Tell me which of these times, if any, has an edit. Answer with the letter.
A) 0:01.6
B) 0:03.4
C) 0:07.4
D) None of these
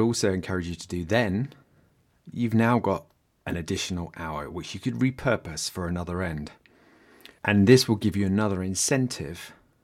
C